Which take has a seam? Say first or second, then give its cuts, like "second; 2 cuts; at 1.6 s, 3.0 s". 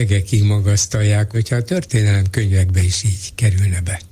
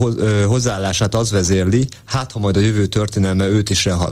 first; 1 cut; at 1.3 s